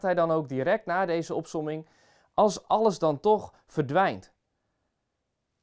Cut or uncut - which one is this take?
uncut